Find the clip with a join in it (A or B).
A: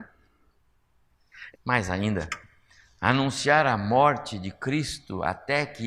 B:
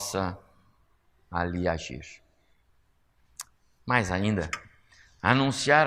A